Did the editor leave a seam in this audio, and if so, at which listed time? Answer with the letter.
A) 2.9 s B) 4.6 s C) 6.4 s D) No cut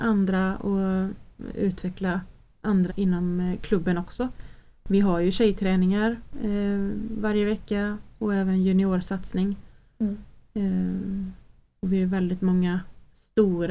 A